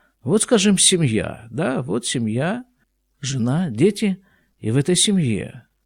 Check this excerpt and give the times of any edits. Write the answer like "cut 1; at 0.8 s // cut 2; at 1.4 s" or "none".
cut 1; at 3.1 s